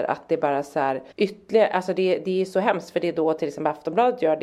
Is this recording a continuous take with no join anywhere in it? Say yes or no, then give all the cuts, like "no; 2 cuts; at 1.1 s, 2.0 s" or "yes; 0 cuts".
no; 1 cut; at 1.1 s